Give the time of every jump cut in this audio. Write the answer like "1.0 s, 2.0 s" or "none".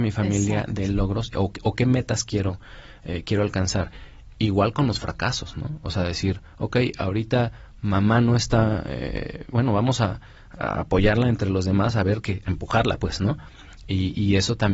9.5 s